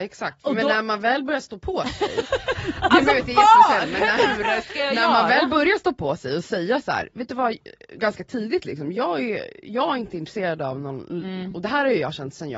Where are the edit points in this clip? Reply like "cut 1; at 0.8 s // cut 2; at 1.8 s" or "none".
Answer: none